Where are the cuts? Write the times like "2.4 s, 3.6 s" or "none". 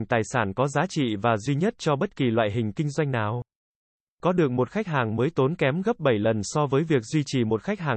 none